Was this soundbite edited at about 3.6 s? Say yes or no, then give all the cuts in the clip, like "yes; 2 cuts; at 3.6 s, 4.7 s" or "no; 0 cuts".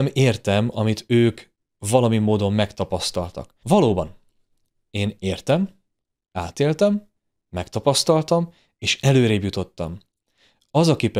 yes; 1 cut; at 3.6 s